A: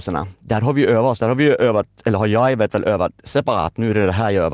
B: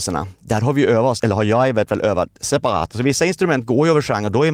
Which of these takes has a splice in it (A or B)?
B